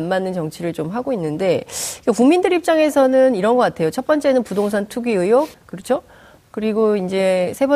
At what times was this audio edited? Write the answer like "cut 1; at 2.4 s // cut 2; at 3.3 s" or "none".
cut 1; at 5.5 s